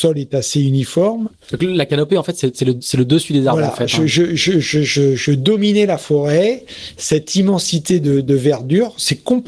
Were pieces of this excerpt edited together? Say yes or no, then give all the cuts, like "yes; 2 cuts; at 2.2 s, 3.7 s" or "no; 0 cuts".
no; 0 cuts